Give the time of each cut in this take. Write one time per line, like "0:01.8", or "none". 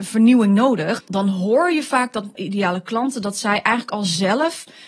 0:01.0
0:02.4

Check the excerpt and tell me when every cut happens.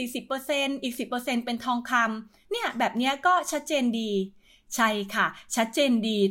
none

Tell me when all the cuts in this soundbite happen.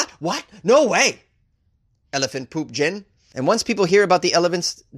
0:03.3

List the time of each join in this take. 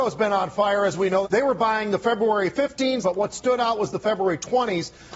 0:01.2
0:03.0

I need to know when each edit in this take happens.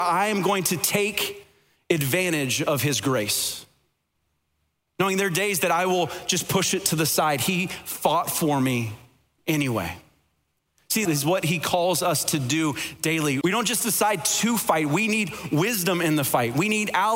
0:11.0
0:13.4

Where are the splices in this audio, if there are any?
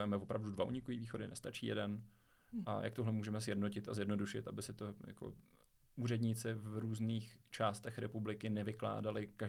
0:02.6

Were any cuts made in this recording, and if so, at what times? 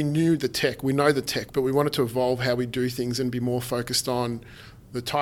0:01.5

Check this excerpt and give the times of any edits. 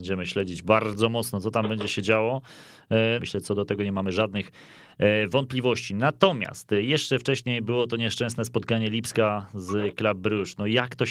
0:03.2

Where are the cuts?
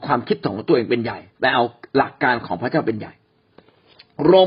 0:01.3

